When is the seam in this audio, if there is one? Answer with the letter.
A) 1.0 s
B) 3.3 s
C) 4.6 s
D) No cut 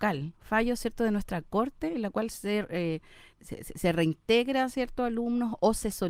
B